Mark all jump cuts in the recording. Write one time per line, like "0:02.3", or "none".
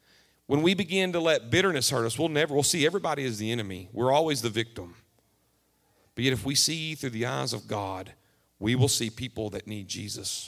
none